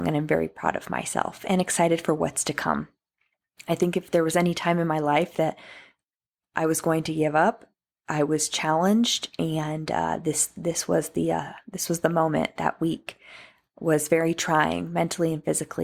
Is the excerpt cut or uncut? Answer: uncut